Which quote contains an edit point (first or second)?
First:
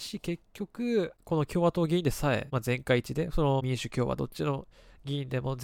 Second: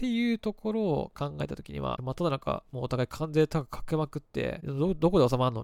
second